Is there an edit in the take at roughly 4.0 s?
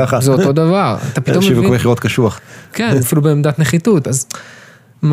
yes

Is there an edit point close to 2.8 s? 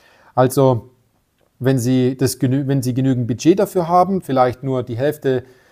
no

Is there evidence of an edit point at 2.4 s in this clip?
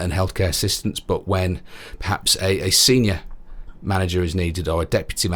no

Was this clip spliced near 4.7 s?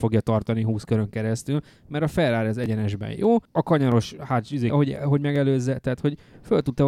yes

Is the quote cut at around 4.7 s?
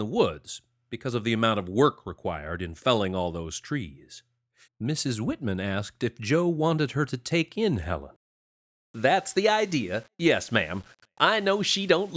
yes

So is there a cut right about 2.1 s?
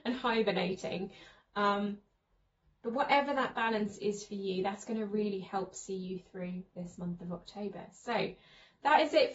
no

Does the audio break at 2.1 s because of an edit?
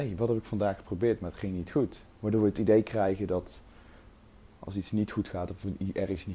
yes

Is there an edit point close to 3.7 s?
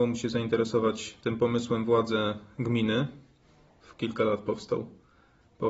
yes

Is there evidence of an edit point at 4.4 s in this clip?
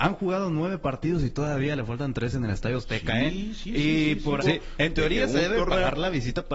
yes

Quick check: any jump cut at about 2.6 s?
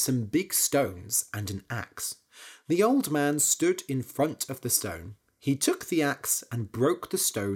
no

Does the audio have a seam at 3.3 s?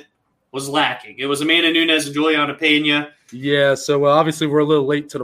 yes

